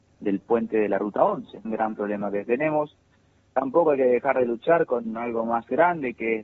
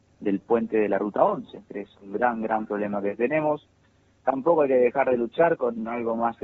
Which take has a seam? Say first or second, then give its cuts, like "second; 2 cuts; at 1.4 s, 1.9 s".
first; 1 cut; at 1.6 s